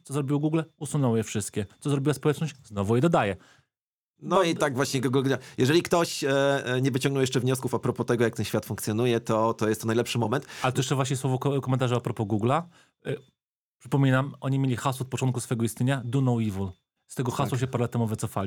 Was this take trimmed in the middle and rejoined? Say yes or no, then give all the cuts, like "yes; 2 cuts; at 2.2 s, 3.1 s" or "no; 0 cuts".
no; 0 cuts